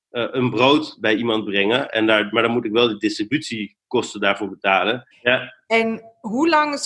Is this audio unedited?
no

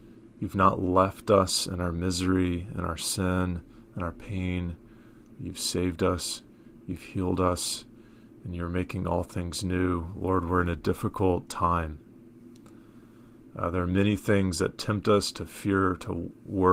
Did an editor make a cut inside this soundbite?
no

